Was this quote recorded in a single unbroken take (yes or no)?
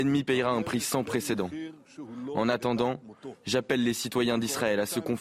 yes